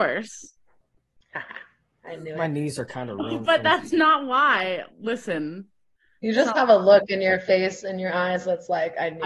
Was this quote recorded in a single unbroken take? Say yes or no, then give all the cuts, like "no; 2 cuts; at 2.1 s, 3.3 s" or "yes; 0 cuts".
yes; 0 cuts